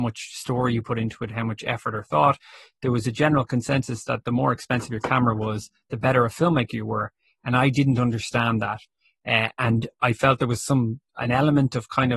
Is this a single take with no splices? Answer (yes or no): yes